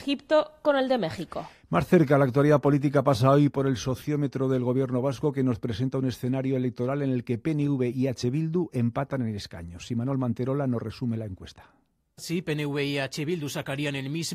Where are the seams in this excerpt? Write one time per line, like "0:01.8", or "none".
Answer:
none

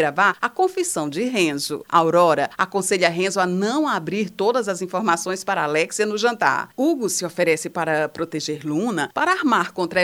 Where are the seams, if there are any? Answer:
0:06.7

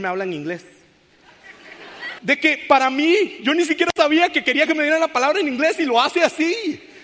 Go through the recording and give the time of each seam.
0:02.2

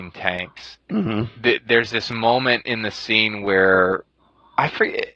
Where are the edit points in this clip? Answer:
none

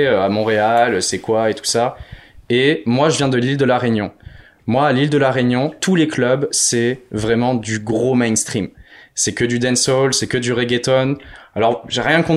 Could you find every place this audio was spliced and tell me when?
none

